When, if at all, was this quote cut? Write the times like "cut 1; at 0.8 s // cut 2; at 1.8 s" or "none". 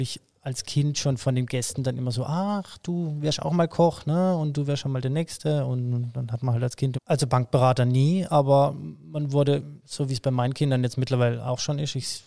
cut 1; at 6.9 s // cut 2; at 9.8 s